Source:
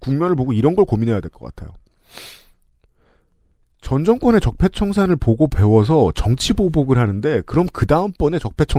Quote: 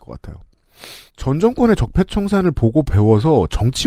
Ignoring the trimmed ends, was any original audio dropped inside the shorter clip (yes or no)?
yes